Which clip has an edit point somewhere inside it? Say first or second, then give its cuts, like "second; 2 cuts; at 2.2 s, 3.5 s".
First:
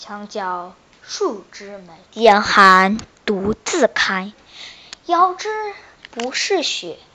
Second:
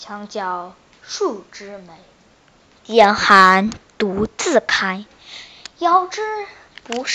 first; 1 cut; at 2.0 s